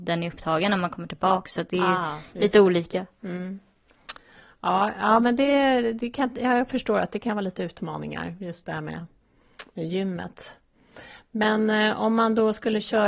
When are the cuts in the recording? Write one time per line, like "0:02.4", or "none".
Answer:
none